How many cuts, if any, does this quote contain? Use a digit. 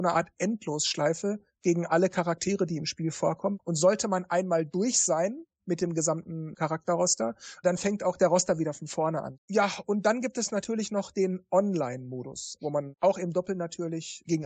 2